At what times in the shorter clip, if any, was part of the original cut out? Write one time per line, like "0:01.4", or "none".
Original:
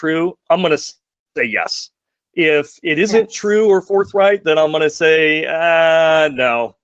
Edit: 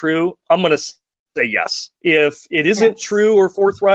0:02.0